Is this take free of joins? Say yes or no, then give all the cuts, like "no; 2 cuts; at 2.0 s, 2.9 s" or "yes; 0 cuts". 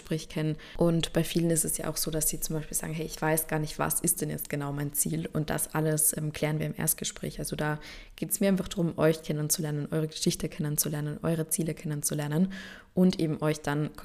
yes; 0 cuts